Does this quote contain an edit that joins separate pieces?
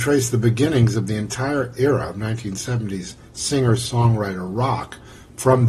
no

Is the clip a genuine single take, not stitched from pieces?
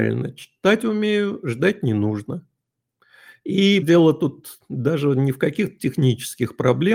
no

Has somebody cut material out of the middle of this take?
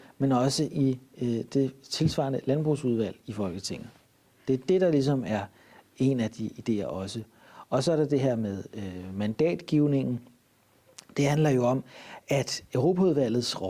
no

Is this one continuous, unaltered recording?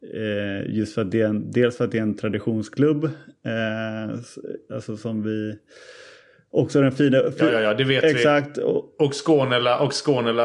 yes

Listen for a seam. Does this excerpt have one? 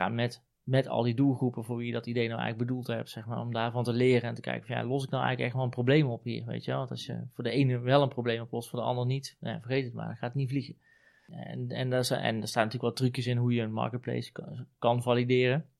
no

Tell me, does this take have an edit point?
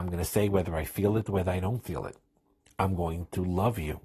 no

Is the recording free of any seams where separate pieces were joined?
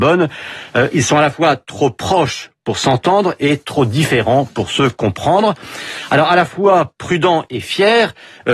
yes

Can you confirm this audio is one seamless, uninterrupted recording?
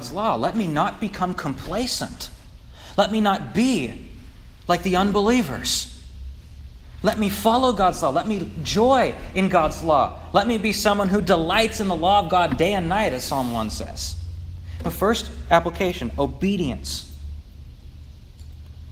yes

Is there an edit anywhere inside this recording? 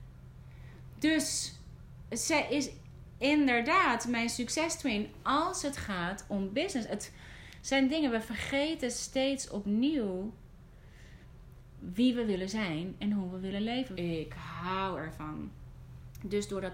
yes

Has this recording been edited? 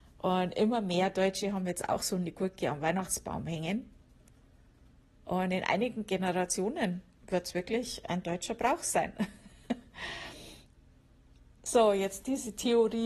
no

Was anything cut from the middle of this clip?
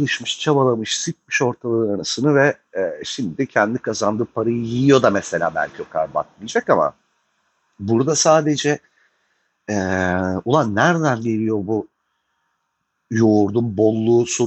no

